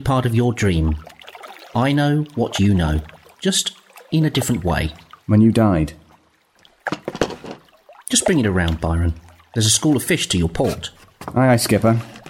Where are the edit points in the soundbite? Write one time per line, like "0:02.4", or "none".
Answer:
0:05.2